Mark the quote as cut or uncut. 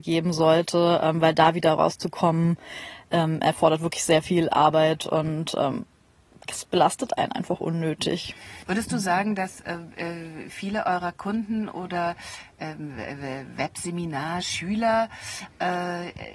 uncut